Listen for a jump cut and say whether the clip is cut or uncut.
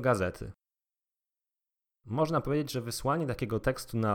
uncut